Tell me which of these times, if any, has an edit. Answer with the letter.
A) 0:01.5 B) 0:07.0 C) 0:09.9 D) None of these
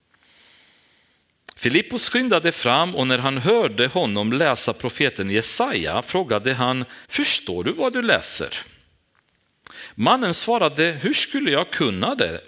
B